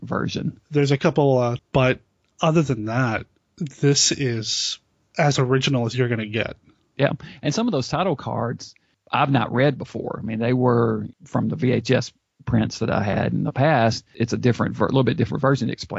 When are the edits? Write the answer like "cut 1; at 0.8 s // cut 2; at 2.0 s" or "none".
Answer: cut 1; at 1.6 s

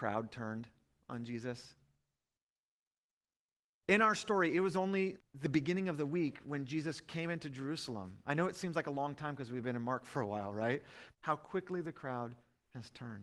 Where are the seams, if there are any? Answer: cut 1; at 5.2 s // cut 2; at 11.1 s

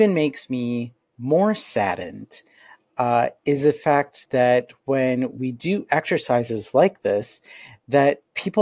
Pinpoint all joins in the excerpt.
none

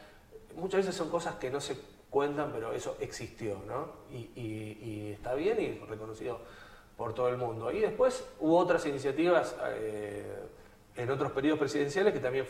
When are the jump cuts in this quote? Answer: none

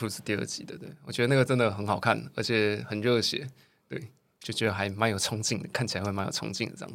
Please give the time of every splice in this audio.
none

